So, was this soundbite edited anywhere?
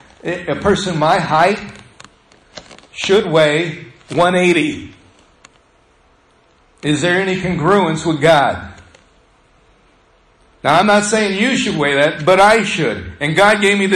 no; 0 cuts

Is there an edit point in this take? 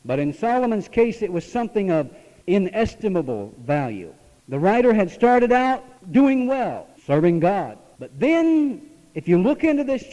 no; 0 cuts

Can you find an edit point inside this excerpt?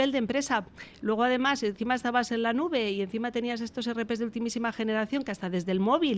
no; 0 cuts

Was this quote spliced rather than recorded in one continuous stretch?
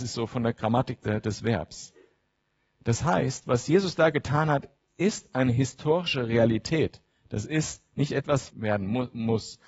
yes; 2 cuts; at 1.0 s, 8.5 s

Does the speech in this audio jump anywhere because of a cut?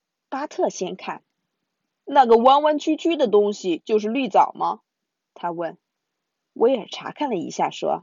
no; 0 cuts

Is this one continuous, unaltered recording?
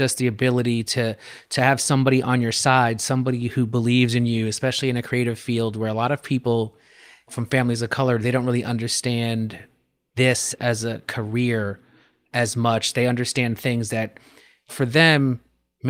yes; 0 cuts

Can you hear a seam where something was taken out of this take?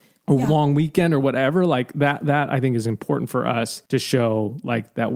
yes; 1 cut; at 3.9 s

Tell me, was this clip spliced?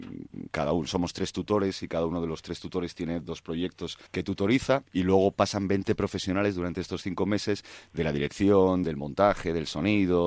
yes; 2 cuts; at 4.1 s, 8.8 s

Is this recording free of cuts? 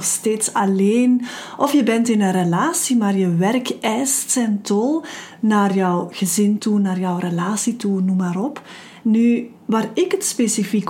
no; 1 cut; at 9.0 s

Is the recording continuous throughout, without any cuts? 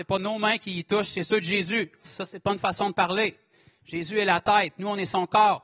no; 1 cut; at 2.0 s

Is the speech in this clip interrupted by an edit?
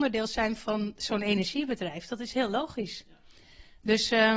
no; 0 cuts

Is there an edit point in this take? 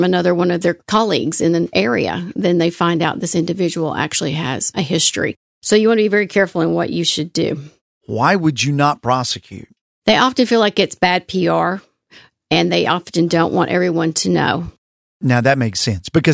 no; 0 cuts

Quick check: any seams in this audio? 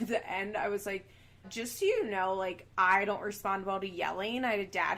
yes; 1 cut; at 1.4 s

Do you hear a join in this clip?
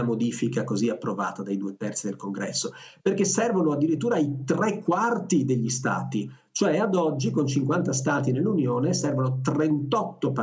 no; 0 cuts

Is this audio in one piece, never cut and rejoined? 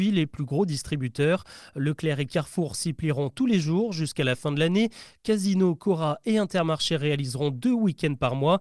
yes; 0 cuts

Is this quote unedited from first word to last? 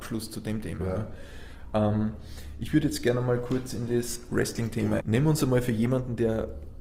no; 1 cut; at 5.0 s

